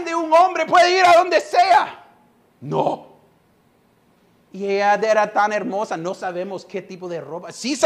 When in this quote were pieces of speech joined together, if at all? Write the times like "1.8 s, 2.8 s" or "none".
2.5 s